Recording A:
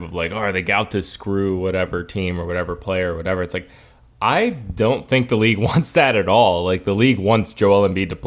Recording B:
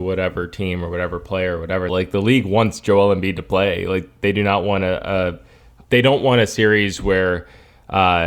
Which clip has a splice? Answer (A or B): B